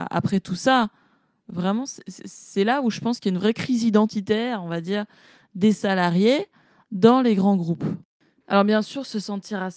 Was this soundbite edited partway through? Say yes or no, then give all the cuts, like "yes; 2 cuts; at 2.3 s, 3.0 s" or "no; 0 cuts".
no; 0 cuts